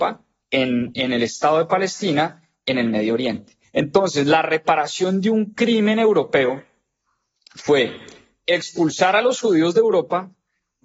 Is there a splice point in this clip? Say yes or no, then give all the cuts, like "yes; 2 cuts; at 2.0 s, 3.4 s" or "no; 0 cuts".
yes; 1 cut; at 3.6 s